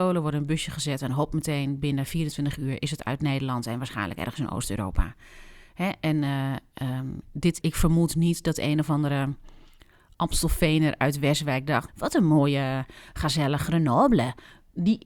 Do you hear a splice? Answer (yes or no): yes